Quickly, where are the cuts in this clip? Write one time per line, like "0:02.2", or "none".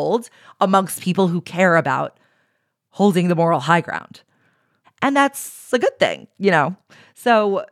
0:04.8